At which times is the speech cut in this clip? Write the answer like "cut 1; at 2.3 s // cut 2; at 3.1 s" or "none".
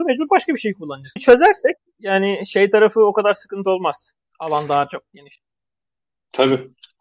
cut 1; at 1.2 s // cut 2; at 4.3 s